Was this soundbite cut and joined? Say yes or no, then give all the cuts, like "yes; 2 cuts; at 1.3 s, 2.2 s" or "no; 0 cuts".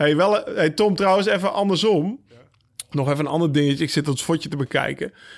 no; 0 cuts